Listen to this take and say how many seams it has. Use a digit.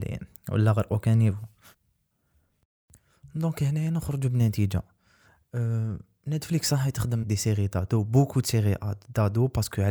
1